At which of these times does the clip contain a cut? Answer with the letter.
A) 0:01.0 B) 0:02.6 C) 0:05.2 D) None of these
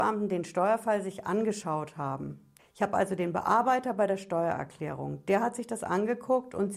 B